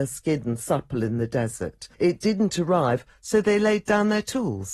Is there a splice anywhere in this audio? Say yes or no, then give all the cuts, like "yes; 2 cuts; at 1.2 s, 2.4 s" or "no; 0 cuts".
yes; 1 cut; at 1.9 s